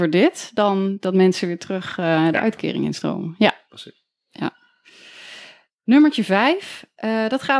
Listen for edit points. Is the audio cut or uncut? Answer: uncut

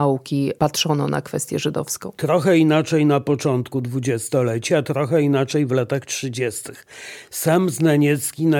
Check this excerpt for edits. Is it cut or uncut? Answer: uncut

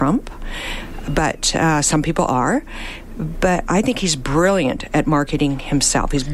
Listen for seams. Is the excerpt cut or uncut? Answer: uncut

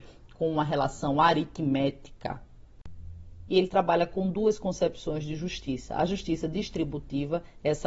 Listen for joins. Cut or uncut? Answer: cut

